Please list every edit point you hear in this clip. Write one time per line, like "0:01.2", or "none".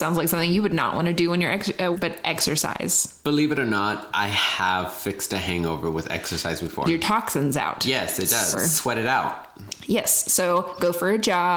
0:01.9
0:06.9
0:08.5